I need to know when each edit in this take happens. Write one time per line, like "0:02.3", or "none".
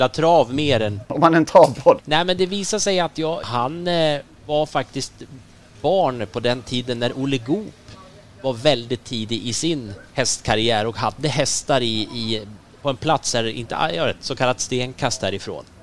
0:02.0
0:03.4